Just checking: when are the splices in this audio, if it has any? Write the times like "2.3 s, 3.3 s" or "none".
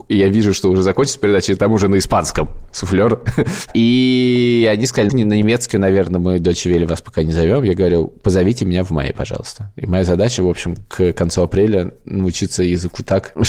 5.1 s